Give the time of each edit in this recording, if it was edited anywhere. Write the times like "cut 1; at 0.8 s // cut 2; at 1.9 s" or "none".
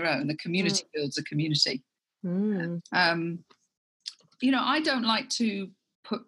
cut 1; at 2.8 s // cut 2; at 4.4 s